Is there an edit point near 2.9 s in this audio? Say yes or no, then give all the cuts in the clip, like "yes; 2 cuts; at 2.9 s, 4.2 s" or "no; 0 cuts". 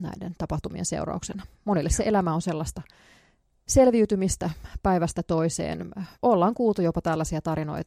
no; 1 cut; at 6.1 s